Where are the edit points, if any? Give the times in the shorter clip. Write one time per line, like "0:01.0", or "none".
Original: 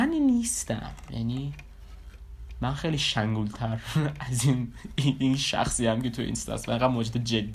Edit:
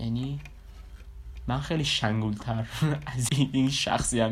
0:03.3

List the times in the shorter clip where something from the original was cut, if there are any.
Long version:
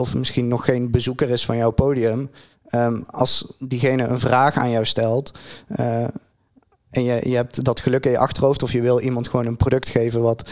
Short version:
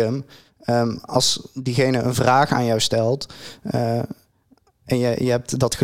none

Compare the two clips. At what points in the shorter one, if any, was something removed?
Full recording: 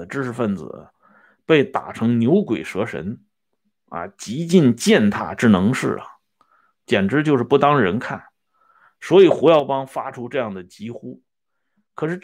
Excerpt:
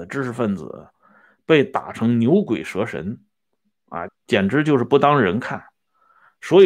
0:04.1

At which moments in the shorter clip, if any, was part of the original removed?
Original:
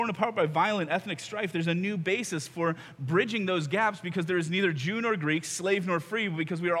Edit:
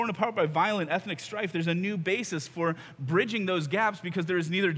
none

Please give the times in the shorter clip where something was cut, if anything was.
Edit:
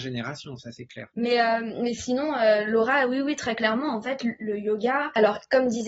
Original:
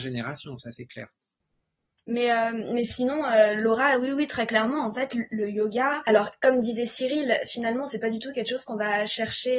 0:01.1

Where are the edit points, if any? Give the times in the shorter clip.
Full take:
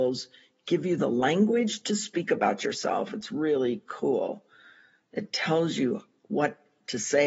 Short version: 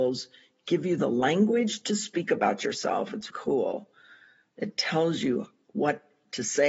0:03.3

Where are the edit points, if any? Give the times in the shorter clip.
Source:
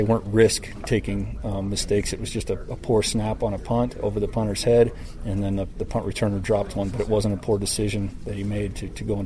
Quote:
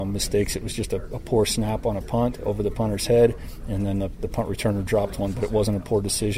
none

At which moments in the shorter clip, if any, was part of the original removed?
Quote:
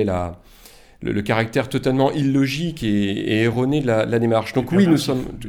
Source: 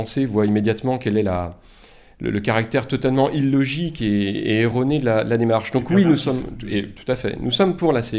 none

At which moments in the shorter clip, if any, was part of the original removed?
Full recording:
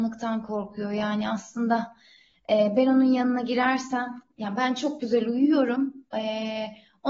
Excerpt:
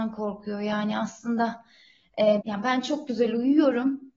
0:02.4

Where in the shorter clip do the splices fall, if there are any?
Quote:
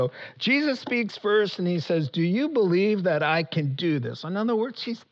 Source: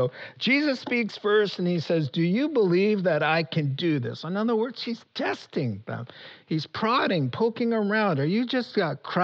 none

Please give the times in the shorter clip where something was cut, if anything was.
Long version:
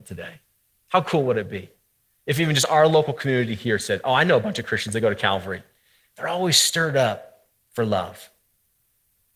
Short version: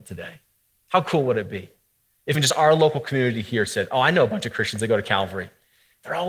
0:02.3

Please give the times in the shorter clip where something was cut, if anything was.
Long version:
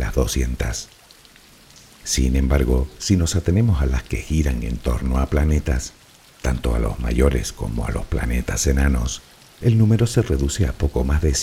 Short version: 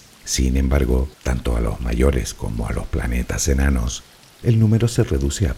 0:01.1

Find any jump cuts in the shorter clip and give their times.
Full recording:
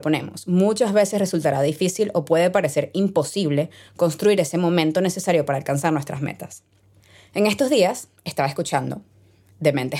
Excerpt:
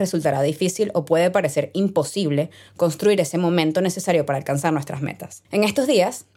0:05.4

